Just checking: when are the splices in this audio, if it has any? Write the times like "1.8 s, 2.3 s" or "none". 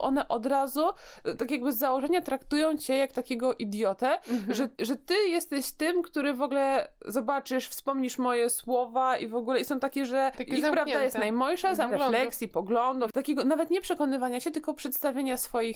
4.7 s, 11.9 s